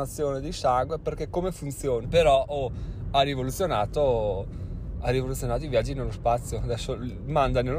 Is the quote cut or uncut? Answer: cut